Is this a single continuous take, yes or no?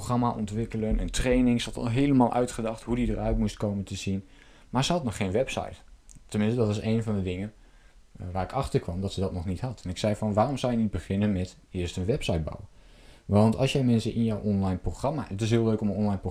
yes